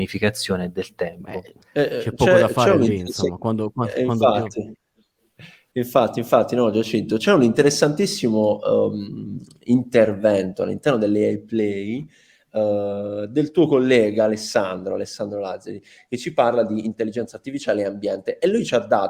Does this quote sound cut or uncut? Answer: cut